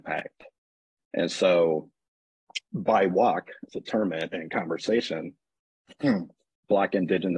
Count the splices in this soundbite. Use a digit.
2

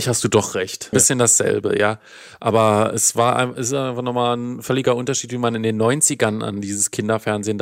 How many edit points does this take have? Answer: 1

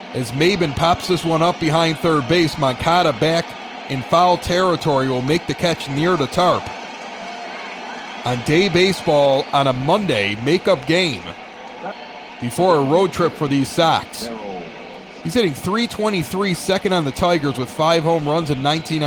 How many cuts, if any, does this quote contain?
1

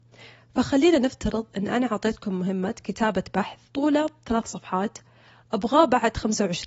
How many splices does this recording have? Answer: 1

